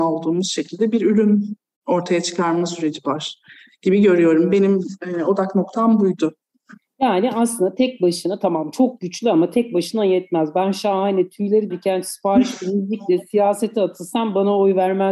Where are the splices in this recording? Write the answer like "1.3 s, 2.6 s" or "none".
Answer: 11.7 s